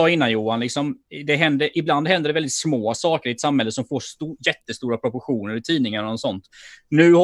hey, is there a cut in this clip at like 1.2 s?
no; 0 cuts

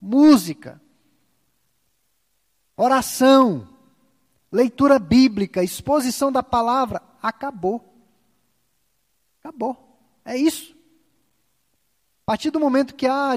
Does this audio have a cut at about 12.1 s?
no; 0 cuts

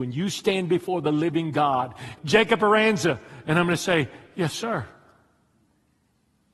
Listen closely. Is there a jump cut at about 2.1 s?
yes; 1 cut; at 2.1 s

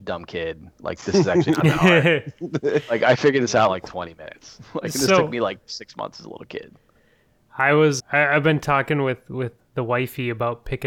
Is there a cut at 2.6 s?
no; 2 cuts; at 8.0 s, 9.6 s

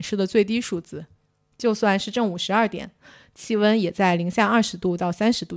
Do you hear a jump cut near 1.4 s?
no; 0 cuts

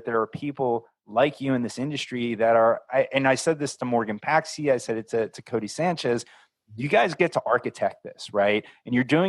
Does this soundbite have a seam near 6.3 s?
no; 0 cuts

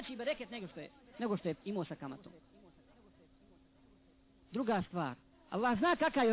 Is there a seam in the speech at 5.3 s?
yes; 1 cut; at 5.3 s

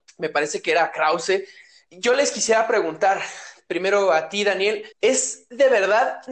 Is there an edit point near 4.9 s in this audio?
yes; 1 cut; at 4.9 s

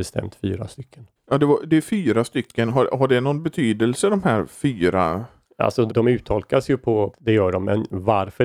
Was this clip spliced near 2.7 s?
no; 2 cuts; at 5.9 s, 7.1 s

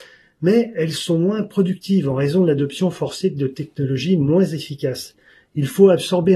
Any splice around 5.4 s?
no; 0 cuts

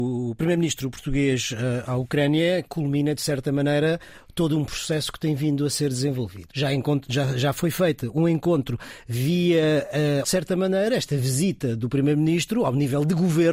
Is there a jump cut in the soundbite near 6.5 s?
yes; 2 cuts; at 6.5 s, 10.2 s

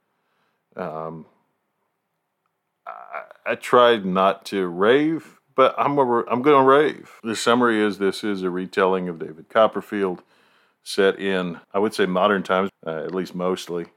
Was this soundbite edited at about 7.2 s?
yes; 3 cuts; at 7.2 s, 11.6 s, 12.7 s

